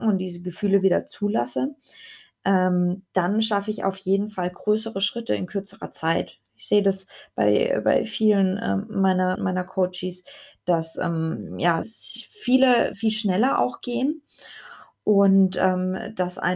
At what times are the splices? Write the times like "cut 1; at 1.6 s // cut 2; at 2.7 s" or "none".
cut 1; at 9.4 s // cut 2; at 11.8 s // cut 3; at 12.9 s